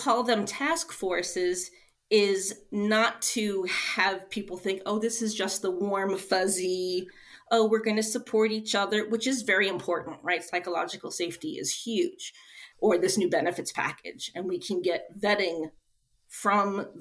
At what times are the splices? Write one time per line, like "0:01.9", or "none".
0:12.7